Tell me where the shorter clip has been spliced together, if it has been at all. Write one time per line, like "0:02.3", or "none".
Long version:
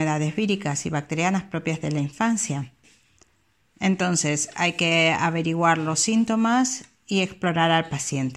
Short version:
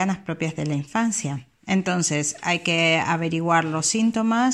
0:01.6